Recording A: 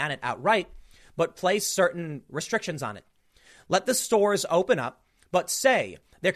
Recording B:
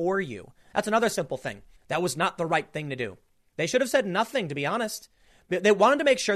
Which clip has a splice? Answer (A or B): B